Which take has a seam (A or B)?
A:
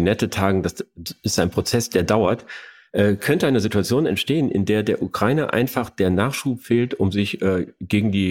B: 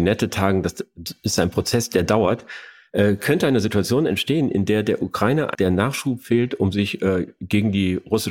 B